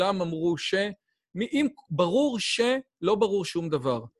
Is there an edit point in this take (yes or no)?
no